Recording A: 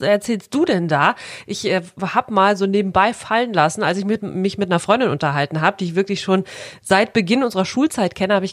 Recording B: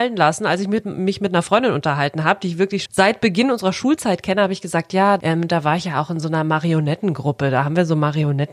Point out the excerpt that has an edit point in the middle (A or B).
B